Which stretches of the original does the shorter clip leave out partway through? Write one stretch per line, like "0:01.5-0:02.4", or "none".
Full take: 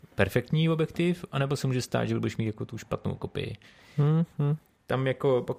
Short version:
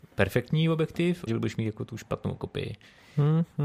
0:01.3-0:02.1